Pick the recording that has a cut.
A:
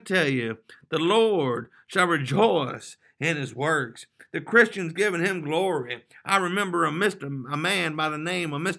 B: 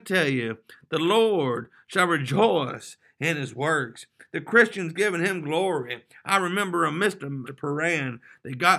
B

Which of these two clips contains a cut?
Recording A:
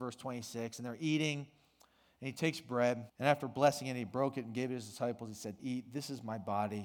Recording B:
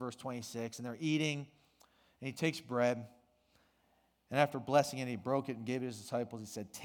A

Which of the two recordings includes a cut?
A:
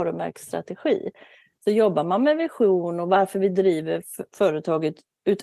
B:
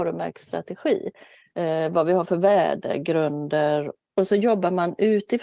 B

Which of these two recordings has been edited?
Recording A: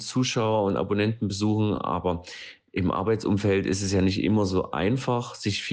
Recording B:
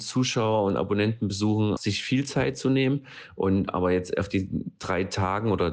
B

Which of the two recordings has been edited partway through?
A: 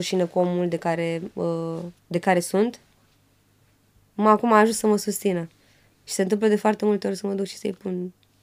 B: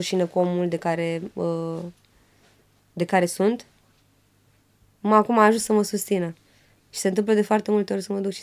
A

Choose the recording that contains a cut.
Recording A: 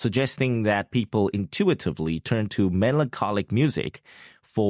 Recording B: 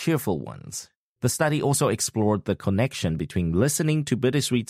B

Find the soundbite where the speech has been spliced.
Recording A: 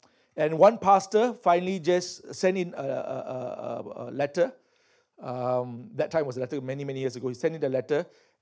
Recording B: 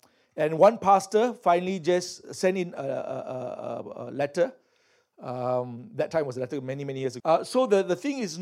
B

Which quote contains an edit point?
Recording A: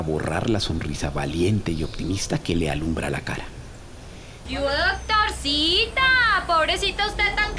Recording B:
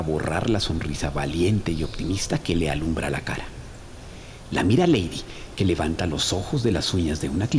A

